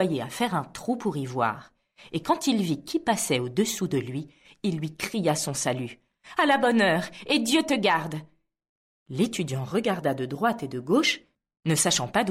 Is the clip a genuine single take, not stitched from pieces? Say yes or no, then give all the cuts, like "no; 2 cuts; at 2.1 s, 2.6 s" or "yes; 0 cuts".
yes; 0 cuts